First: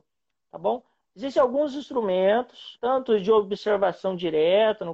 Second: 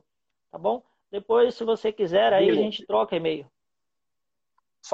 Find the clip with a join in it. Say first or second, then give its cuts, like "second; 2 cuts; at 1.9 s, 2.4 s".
first; 2 cuts; at 1.0 s, 2.8 s